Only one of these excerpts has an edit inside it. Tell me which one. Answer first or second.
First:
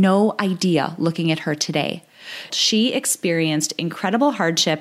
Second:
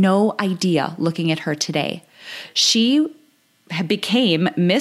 first